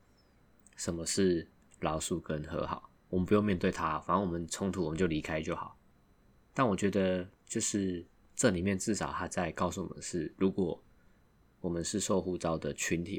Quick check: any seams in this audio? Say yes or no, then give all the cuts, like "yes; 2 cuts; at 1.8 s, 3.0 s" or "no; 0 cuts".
no; 0 cuts